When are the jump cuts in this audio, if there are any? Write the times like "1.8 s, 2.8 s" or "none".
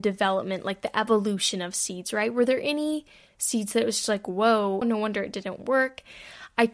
4.8 s